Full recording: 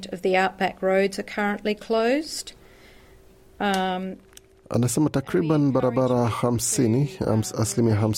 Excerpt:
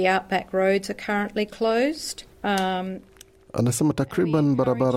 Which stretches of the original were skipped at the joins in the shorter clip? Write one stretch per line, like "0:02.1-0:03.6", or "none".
0:02.6-0:03.5